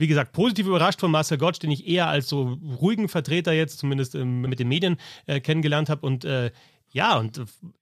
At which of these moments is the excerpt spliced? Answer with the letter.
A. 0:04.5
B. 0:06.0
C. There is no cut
A